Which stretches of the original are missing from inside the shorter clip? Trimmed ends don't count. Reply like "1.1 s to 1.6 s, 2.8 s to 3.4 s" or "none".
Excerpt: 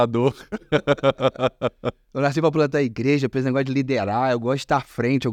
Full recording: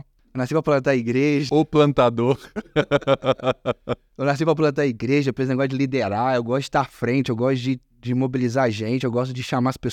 none